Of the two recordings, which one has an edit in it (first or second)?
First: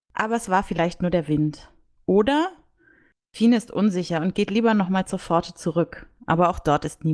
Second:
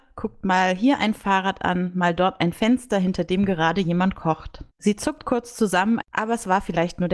second